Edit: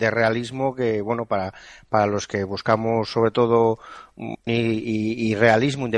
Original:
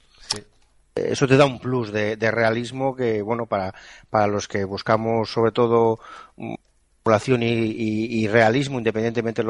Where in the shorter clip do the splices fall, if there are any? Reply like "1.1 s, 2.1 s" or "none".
4.5 s